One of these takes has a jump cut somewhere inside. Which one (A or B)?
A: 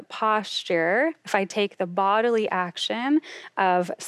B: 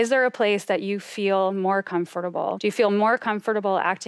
B